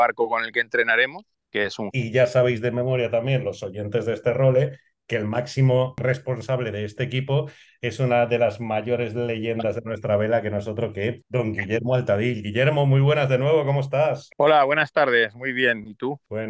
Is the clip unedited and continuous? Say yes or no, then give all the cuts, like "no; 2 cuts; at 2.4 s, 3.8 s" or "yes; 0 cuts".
no; 1 cut; at 1.9 s